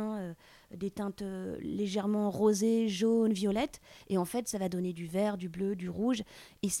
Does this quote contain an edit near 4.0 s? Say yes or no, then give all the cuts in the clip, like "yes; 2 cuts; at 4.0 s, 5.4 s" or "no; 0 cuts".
no; 0 cuts